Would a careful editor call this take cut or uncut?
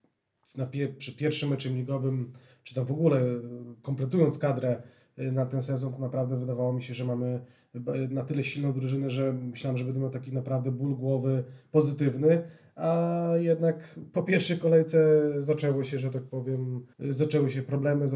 cut